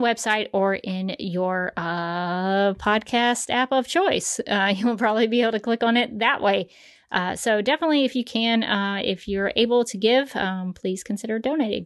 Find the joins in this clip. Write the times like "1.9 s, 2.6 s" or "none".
none